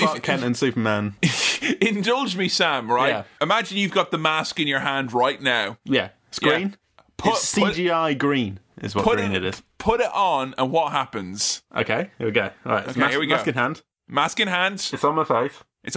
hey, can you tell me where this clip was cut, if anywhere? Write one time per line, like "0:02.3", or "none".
none